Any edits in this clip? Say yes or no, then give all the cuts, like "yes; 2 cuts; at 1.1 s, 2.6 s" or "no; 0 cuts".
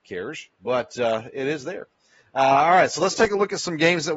no; 0 cuts